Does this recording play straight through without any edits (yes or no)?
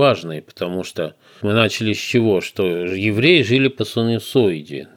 no